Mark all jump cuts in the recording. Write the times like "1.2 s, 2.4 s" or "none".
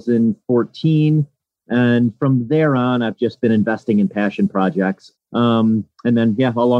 5.1 s